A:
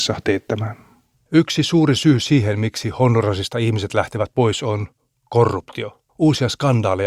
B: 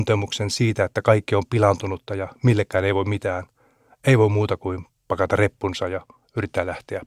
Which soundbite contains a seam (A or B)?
A